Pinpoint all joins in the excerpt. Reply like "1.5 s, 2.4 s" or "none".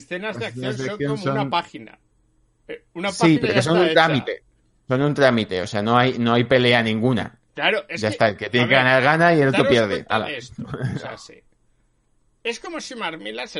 none